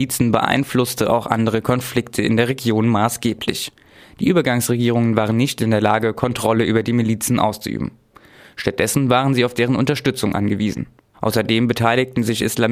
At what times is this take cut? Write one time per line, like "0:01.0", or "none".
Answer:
0:04.0
0:11.1

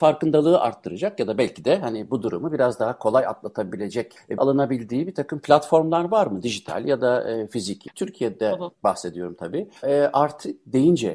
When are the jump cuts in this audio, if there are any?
0:04.4
0:07.9
0:09.8

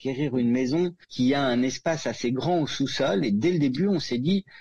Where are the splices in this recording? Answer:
0:01.0

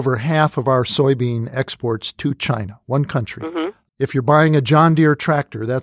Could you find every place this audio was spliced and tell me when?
0:03.9

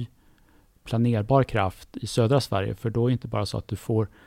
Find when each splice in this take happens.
none

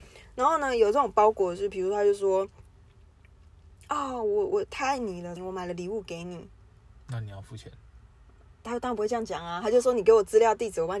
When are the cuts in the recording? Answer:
0:05.4

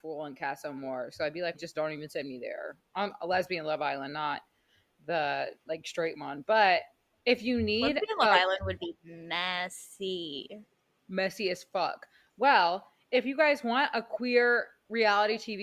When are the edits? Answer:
0:01.5

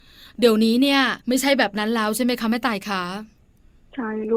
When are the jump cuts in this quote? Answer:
0:01.2

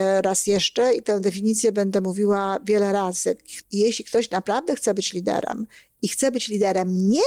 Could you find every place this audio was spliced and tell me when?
0:03.6

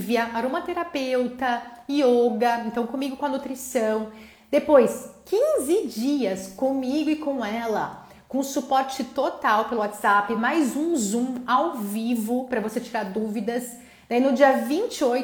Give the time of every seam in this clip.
none

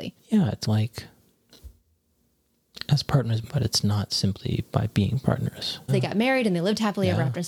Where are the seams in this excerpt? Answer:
0:03.5
0:05.9

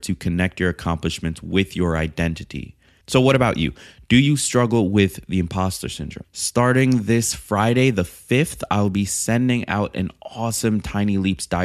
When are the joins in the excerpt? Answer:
0:03.0
0:06.2

